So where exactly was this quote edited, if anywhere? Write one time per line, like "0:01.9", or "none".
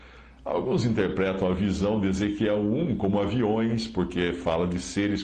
none